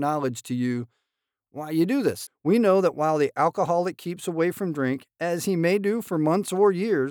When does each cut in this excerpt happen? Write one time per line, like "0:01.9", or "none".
0:02.3

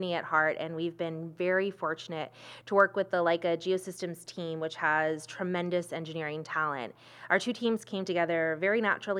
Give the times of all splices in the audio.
none

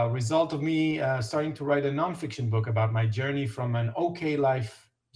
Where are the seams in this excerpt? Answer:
none

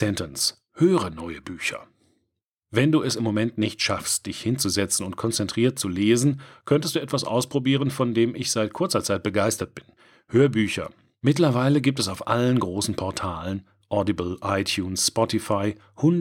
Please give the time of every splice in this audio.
none

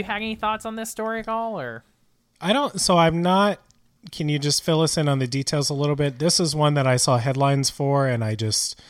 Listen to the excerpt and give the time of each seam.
none

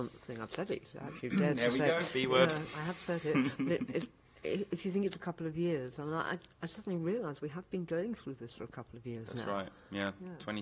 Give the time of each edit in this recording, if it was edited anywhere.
none

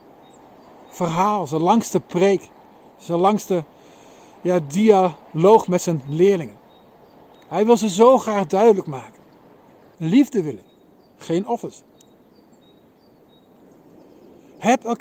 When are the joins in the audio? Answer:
0:09.9

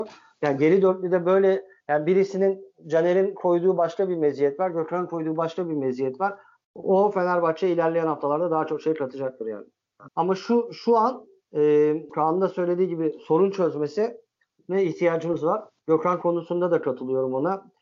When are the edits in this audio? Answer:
0:06.6
0:10.1
0:12.1

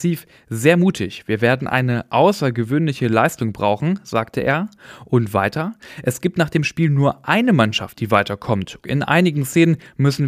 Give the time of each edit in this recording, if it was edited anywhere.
0:08.8

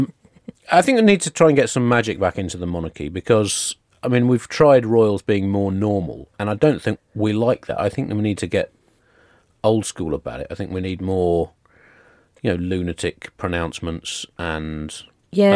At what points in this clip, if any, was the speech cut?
0:07.0

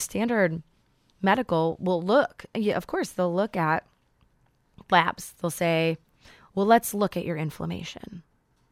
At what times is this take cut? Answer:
none

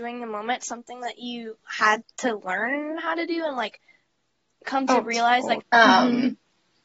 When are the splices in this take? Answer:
0:05.6

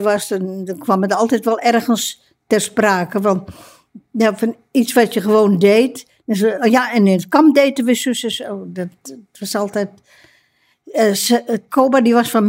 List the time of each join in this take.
none

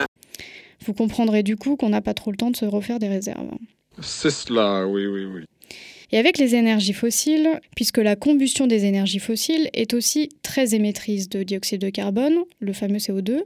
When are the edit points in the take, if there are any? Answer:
0:06.0
0:07.6

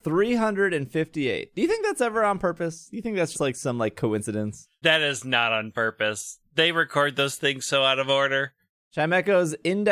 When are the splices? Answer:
0:03.3

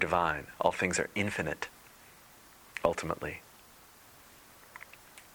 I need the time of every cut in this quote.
none

